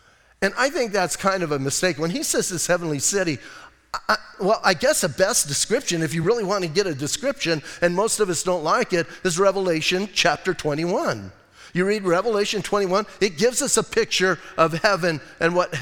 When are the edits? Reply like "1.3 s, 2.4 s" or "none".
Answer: none

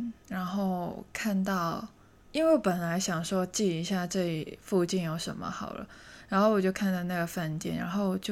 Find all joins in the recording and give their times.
2.2 s

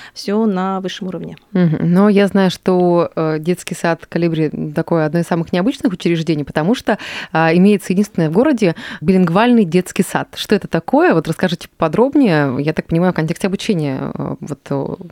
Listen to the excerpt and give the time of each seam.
none

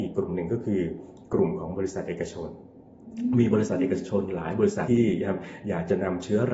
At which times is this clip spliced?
4.9 s

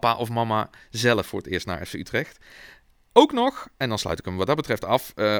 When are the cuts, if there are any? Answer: none

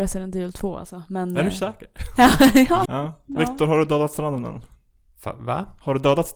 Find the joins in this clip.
2.8 s

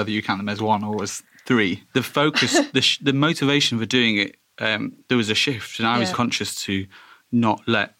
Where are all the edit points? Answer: 1.9 s, 6.1 s

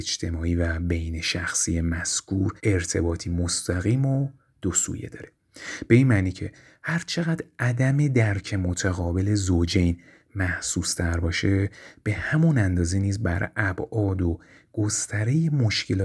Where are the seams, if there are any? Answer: 2.6 s

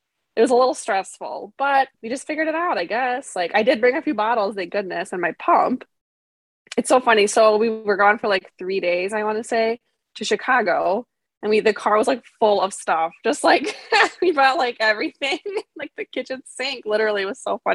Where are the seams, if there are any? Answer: 1.9 s

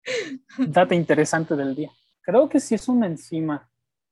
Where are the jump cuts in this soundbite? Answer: 2.1 s

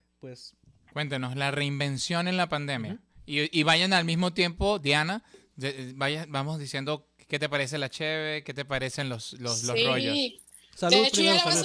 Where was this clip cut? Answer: none

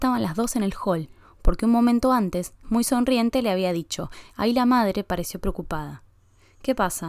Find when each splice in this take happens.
2.6 s, 4.3 s

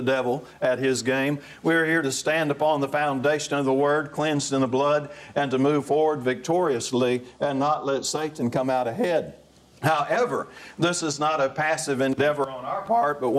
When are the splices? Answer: none

